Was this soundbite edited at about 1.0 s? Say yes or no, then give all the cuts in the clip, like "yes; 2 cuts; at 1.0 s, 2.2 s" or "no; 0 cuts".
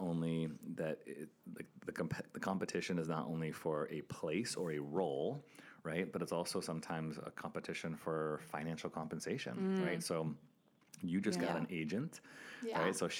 yes; 1 cut; at 1.0 s